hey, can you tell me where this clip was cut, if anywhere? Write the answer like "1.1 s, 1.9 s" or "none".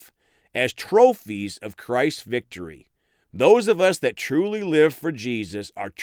3.2 s